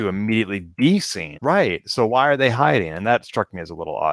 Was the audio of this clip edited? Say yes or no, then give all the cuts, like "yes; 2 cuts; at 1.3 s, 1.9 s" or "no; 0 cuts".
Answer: yes; 1 cut; at 1.4 s